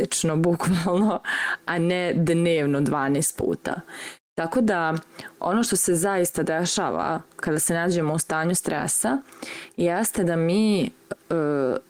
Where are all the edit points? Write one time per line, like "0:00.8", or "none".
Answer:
none